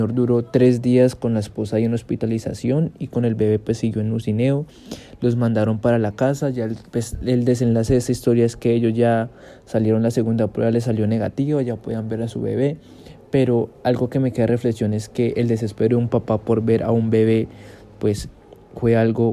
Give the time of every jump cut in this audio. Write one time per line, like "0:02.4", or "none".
0:06.9